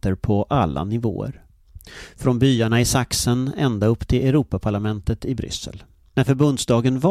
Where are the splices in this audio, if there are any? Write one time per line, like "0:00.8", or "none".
0:06.1